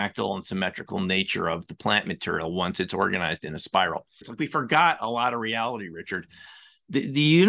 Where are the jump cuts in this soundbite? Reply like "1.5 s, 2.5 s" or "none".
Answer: 4.2 s